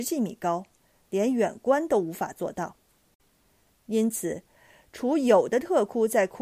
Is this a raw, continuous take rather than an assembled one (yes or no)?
no